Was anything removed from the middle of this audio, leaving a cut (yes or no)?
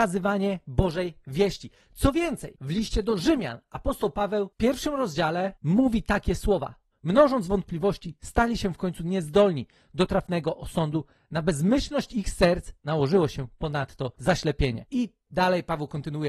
yes